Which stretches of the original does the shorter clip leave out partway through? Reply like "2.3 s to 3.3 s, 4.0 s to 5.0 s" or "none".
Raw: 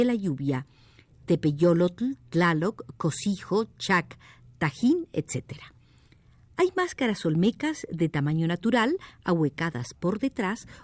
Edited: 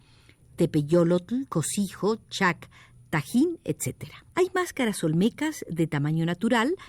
2.2 s to 3.0 s, 5.8 s to 6.5 s

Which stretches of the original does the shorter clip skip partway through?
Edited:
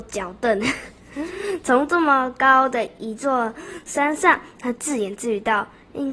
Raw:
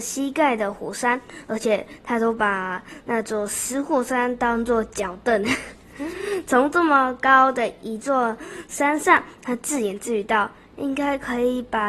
none

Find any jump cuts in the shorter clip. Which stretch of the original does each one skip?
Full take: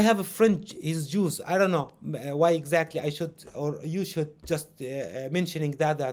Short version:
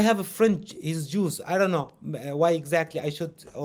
none

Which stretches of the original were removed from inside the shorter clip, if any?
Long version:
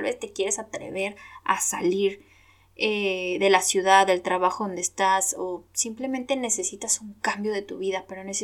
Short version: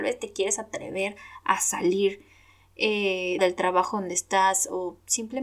3.4 s to 4.1 s

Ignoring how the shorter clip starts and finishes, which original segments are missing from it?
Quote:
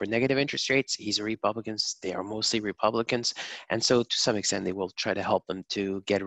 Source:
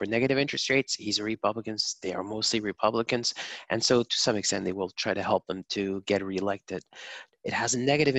none

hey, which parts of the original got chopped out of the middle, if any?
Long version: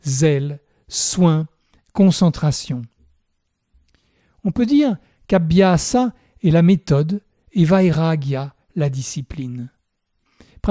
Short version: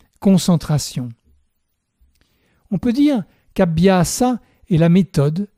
none

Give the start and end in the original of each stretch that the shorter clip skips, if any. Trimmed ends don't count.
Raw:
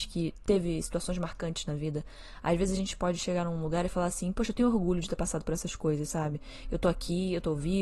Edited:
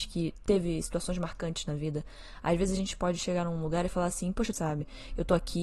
4.5 s to 6.1 s

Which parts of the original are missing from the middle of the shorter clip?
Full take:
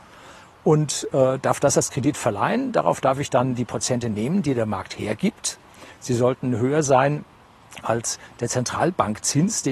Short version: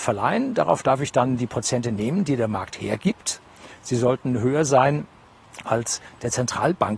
none

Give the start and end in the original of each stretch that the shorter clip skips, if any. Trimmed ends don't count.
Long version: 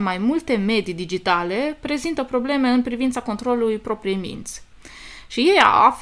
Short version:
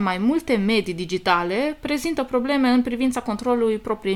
none

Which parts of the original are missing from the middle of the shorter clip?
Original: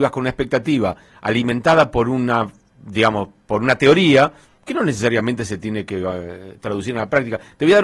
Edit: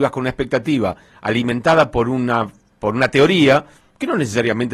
2.7 s to 3.4 s

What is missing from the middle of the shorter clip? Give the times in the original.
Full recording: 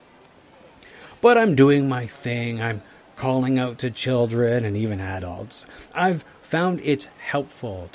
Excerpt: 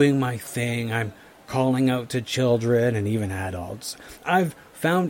none

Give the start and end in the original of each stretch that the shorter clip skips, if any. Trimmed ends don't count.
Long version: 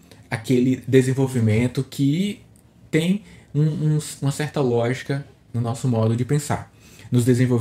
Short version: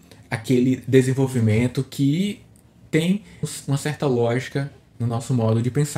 3.4 s to 4.0 s

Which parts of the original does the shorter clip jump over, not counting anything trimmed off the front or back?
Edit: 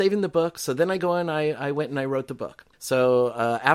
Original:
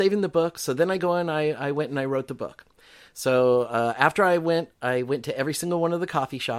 2.7 s to 3.1 s

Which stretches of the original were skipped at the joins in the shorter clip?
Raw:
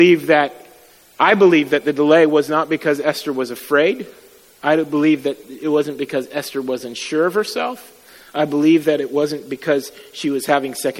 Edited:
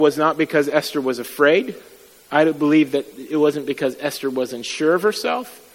none

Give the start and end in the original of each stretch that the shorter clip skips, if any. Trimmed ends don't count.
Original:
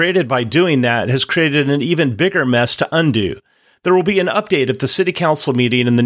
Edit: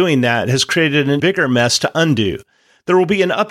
1.8 s to 2.2 s

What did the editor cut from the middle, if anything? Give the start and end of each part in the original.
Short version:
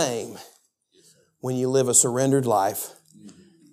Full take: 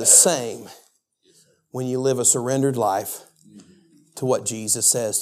none

